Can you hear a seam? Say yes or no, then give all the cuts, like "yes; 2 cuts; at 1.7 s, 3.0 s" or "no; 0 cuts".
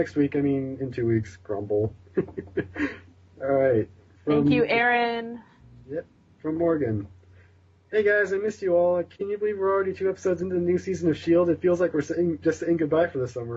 no; 0 cuts